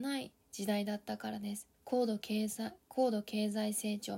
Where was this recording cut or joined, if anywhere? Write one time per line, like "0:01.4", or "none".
0:01.7